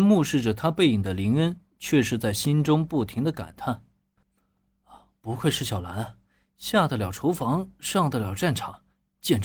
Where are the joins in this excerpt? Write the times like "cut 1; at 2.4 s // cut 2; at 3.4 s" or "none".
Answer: none